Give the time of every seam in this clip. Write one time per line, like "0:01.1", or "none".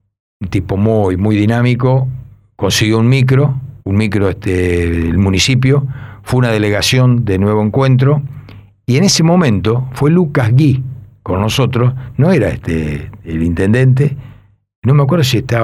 0:03.8